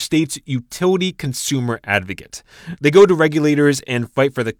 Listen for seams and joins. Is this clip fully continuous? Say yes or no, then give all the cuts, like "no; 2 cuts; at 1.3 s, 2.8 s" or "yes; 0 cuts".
no; 1 cut; at 2.8 s